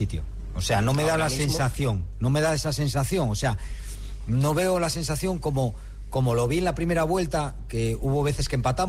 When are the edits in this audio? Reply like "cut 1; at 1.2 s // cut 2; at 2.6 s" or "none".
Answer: none